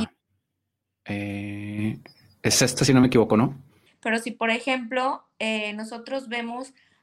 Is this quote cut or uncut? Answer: cut